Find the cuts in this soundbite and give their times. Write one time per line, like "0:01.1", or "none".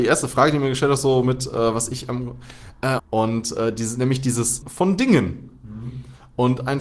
0:03.0
0:04.6